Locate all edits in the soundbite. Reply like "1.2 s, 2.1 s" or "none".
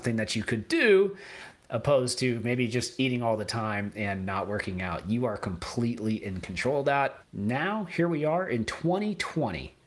7.2 s